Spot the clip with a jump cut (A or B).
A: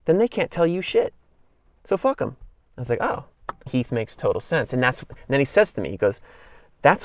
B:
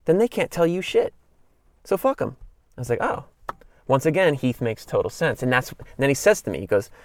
A